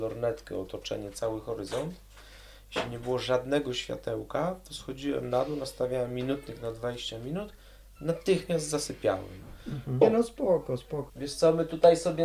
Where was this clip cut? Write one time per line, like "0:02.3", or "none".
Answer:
0:10.0
0:11.1